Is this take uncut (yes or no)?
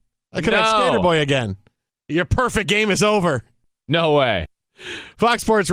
yes